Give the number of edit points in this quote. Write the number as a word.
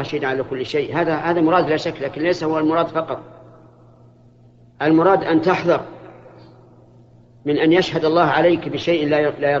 zero